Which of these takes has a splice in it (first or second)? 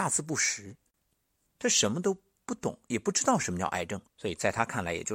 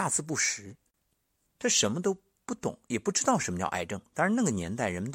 first